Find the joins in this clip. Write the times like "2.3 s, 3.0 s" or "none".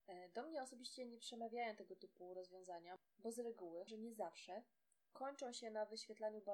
3.9 s